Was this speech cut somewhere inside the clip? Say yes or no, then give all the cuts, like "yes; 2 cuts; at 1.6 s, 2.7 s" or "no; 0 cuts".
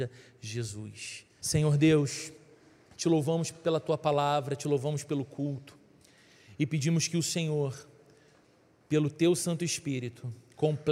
yes; 1 cut; at 1.4 s